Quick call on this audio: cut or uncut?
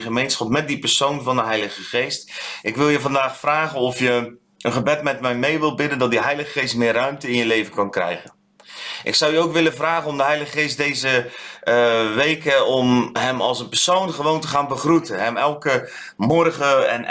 uncut